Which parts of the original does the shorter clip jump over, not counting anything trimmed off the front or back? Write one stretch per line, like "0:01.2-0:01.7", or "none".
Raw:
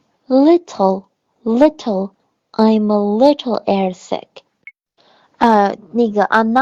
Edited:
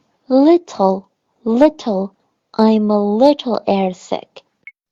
none